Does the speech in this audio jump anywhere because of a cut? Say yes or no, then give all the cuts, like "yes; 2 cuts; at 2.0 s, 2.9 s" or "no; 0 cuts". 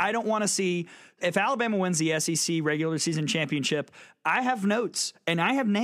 no; 0 cuts